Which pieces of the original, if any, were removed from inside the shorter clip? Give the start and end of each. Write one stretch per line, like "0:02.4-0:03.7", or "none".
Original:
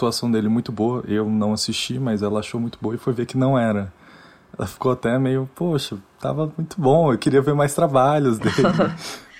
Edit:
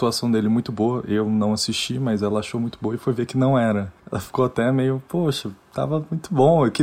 0:04.0-0:04.5